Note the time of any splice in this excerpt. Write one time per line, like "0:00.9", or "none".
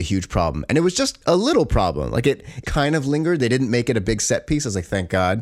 0:01.2
0:02.6